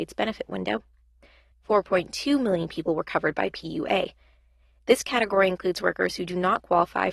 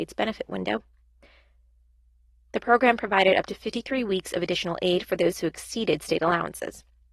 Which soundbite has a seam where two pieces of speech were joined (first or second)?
first